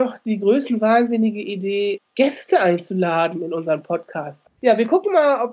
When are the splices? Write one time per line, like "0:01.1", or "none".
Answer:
0:02.0
0:04.5